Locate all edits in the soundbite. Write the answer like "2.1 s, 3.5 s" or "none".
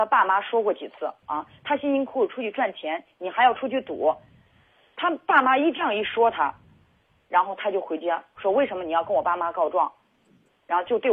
1.2 s